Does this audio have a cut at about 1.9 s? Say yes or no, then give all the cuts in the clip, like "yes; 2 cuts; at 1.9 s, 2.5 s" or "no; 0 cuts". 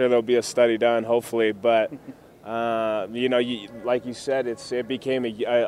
no; 0 cuts